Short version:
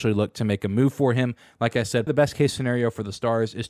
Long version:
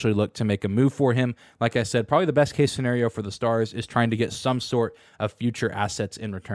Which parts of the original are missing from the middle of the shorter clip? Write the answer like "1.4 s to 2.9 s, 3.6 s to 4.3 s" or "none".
2.1 s to 2.3 s